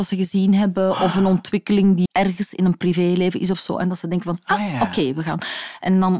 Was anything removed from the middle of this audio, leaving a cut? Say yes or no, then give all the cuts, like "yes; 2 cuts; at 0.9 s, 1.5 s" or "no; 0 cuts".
yes; 1 cut; at 2.1 s